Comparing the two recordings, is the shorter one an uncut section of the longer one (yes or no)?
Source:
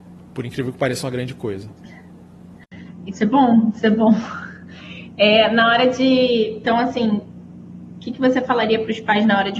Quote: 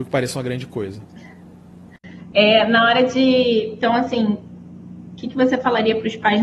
no